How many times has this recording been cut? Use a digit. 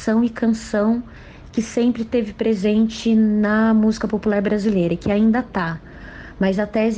0